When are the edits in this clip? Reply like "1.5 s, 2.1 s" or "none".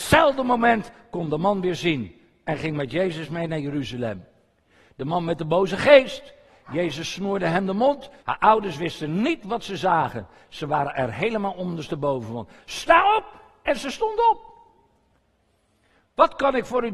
8.2 s